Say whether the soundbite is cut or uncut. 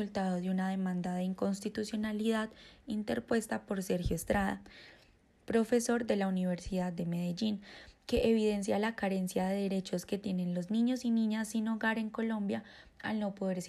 uncut